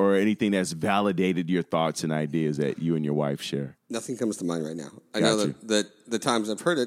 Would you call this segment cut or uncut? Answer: cut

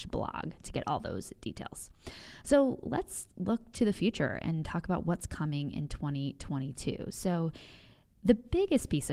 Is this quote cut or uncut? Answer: uncut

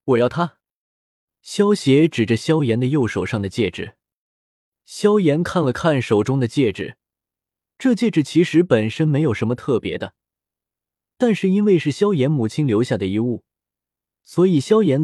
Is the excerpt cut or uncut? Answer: uncut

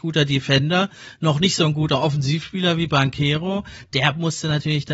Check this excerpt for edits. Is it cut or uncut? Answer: uncut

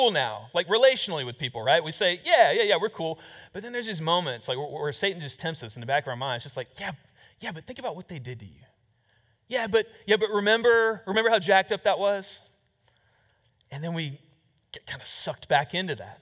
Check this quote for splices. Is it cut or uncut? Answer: uncut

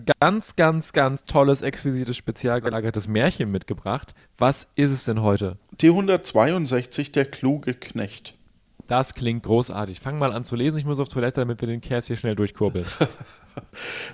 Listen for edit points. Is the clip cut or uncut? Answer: uncut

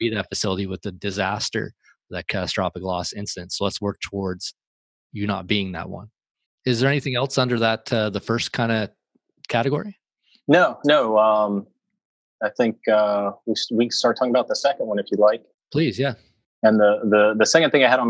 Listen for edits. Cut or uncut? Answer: uncut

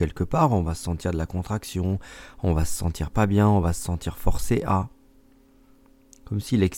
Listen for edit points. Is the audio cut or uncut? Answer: uncut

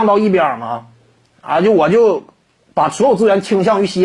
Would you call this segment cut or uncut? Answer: uncut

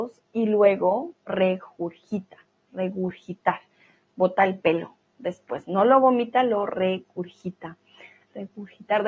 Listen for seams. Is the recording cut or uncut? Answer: uncut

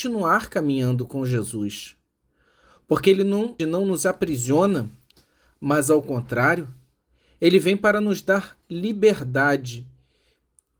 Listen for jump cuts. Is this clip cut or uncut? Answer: cut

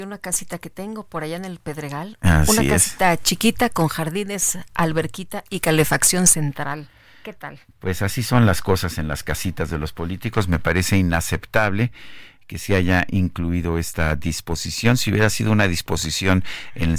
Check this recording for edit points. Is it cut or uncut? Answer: uncut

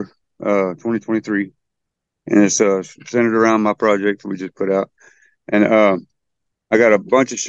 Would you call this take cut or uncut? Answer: uncut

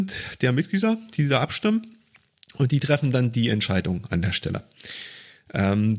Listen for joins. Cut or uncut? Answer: uncut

